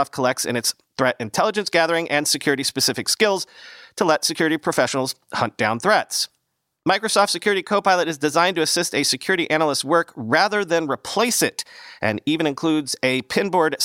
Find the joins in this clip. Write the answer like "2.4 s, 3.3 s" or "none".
none